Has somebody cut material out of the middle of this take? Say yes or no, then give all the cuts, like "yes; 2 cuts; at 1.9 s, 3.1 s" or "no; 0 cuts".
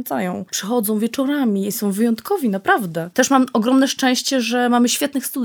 yes; 1 cut; at 1.7 s